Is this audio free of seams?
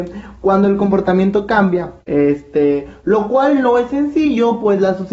no; 1 cut; at 2.0 s

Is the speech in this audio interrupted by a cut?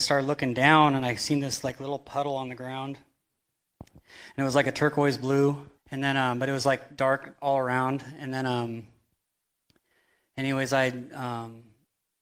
yes; 1 cut; at 5.8 s

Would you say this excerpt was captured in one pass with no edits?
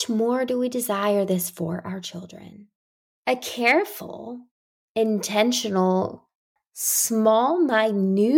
no; 2 cuts; at 3.1 s, 6.6 s

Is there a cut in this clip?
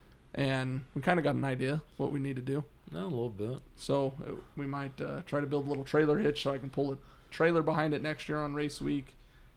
no; 0 cuts

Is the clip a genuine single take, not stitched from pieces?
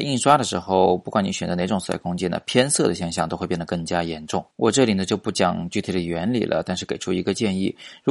no; 1 cut; at 4.5 s

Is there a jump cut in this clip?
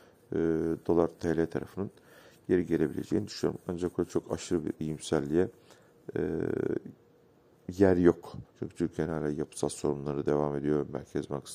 yes; 1 cut; at 8.5 s

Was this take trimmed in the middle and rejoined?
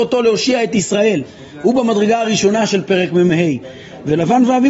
no; 0 cuts

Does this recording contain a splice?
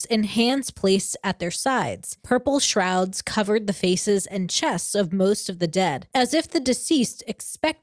no; 0 cuts

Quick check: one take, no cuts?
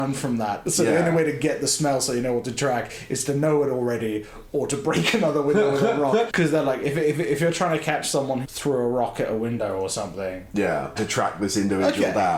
no; 3 cuts; at 6.3 s, 8.4 s, 11.0 s

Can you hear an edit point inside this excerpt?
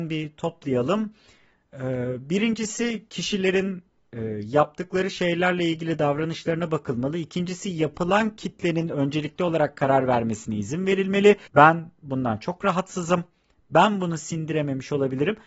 yes; 1 cut; at 11.5 s

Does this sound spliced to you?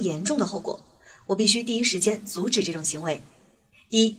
no; 0 cuts

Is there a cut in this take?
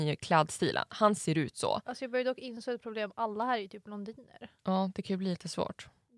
yes; 1 cut; at 4.6 s

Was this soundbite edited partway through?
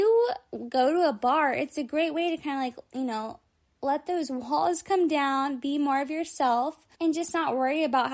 yes; 1 cut; at 6.9 s

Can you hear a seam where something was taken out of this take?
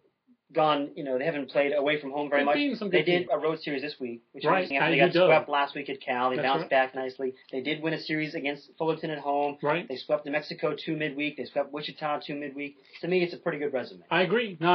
yes; 3 cuts; at 3.3 s, 4.7 s, 7.4 s

